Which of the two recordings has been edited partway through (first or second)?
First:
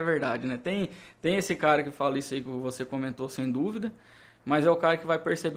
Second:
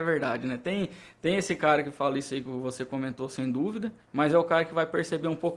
second